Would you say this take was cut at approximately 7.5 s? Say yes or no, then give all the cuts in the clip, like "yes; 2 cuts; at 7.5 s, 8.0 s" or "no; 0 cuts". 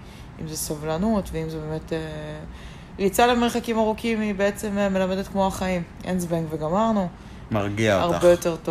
yes; 1 cut; at 7.5 s